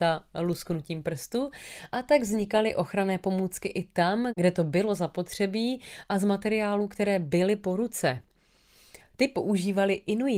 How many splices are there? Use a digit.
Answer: 1